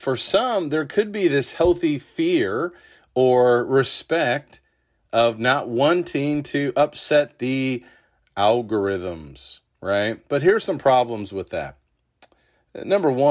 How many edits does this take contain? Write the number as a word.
zero